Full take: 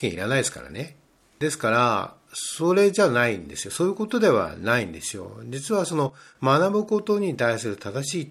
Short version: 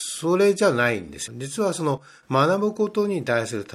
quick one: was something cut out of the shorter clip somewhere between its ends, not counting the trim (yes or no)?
yes